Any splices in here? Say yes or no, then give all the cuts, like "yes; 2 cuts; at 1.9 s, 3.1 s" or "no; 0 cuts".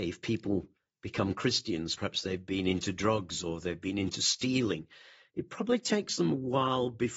yes; 1 cut; at 2.0 s